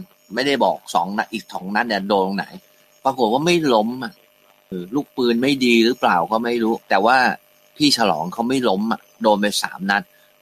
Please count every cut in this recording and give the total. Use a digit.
2